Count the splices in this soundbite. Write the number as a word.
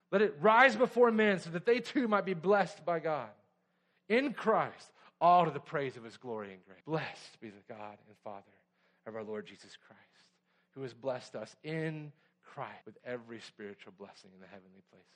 two